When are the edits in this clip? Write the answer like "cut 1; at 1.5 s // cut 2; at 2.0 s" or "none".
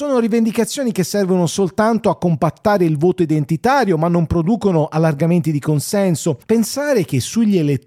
cut 1; at 6.4 s